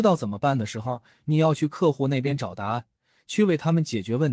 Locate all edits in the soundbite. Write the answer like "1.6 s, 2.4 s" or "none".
none